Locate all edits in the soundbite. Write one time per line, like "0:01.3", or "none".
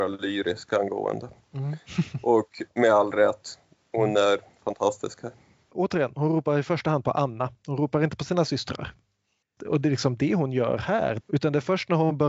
0:09.6
0:11.2